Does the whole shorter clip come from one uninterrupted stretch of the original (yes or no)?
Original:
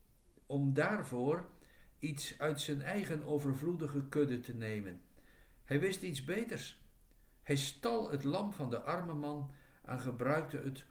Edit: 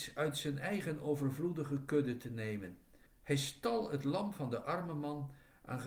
no